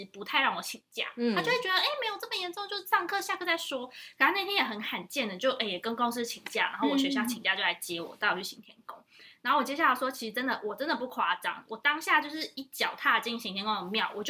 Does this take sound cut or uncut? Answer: uncut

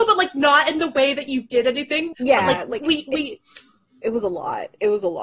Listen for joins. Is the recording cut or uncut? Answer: cut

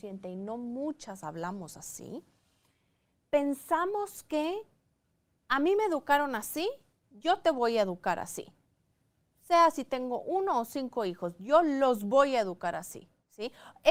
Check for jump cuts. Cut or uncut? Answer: uncut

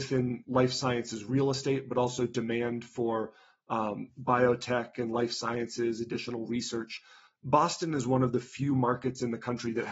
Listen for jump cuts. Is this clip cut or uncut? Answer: uncut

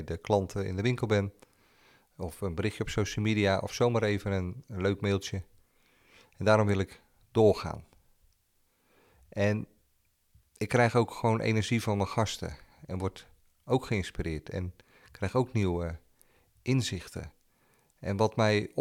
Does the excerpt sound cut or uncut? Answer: uncut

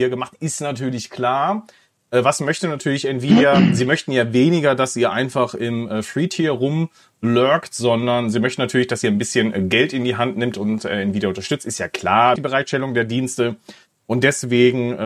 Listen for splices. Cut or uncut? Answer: cut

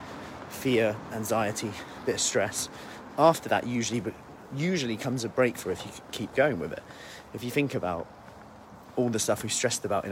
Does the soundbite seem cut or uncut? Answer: uncut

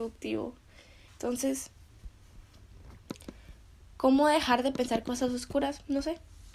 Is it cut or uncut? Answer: cut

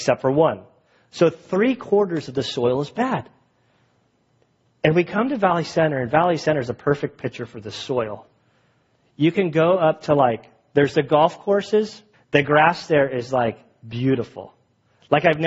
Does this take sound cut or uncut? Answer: cut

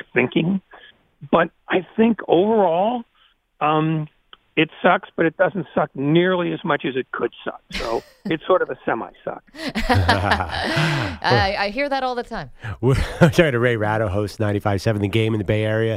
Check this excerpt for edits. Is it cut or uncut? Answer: uncut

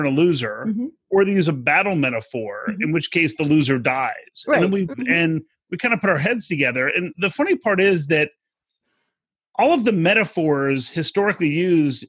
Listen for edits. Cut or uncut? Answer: cut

